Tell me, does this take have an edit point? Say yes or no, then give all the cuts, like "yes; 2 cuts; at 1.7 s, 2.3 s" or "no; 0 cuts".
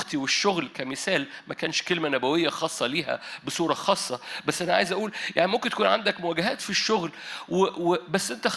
no; 0 cuts